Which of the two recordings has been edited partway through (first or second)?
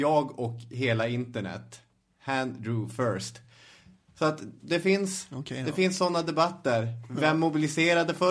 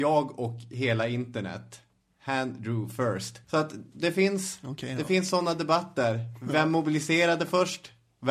second